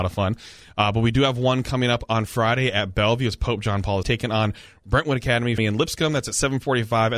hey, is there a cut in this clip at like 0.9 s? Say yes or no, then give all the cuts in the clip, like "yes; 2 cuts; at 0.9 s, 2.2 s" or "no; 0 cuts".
no; 2 cuts; at 4.0 s, 5.6 s